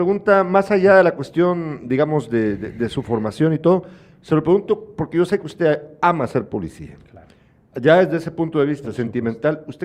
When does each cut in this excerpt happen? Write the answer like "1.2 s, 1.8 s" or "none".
none